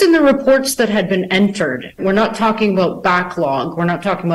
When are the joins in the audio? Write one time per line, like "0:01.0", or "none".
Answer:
0:02.0